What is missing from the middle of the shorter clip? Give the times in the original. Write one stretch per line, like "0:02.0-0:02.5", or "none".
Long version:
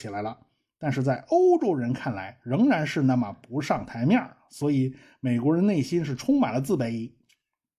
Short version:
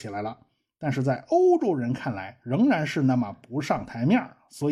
none